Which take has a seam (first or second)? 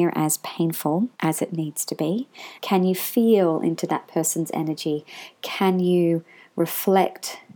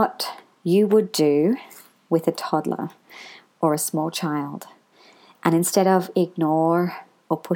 first